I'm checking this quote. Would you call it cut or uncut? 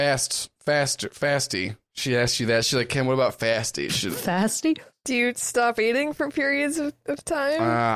uncut